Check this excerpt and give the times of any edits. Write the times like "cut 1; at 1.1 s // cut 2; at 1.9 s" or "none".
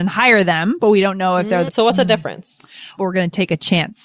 cut 1; at 1.7 s // cut 2; at 3.0 s